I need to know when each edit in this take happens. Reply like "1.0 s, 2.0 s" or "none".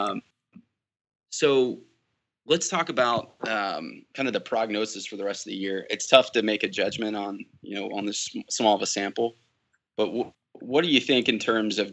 none